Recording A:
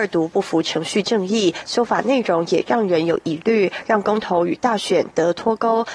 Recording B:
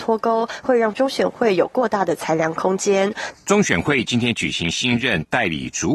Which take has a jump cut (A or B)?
B